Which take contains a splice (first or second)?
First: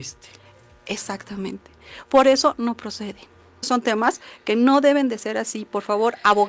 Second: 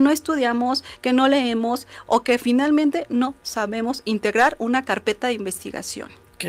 first